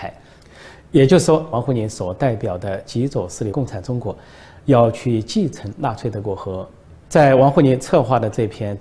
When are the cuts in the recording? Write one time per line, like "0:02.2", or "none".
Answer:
0:01.5
0:03.5
0:07.0